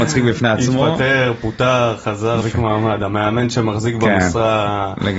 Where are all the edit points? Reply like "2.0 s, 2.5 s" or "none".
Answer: 2.4 s